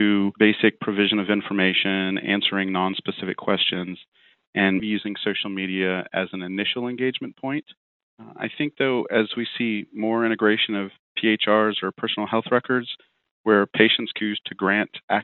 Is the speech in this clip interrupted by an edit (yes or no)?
yes